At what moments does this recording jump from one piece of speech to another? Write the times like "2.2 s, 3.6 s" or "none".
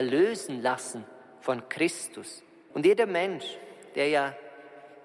2.7 s